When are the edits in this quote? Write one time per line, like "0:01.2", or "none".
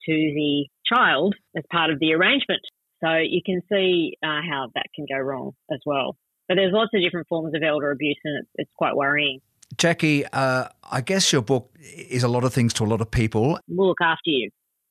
0:11.7
0:13.6